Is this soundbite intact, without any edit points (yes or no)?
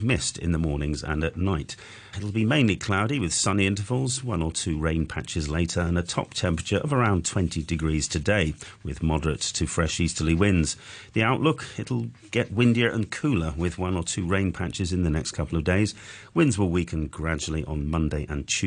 no